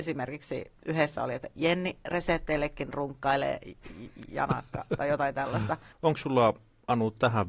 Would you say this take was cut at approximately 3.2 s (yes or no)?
no